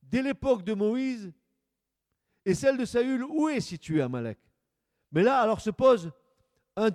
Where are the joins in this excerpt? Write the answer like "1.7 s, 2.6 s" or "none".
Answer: none